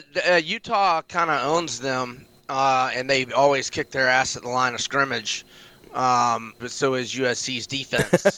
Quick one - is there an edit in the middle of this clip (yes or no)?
yes